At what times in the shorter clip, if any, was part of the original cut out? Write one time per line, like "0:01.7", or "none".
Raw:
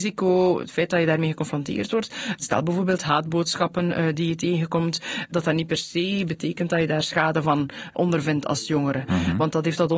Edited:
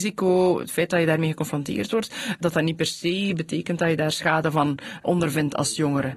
0:02.4